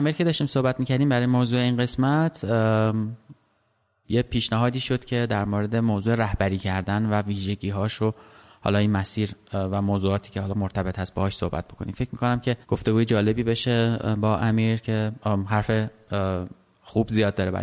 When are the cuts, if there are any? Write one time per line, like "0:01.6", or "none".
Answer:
0:12.6